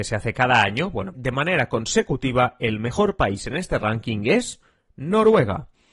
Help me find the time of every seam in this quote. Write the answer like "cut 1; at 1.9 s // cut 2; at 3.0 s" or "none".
cut 1; at 1.1 s